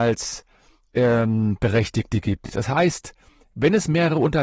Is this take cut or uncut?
uncut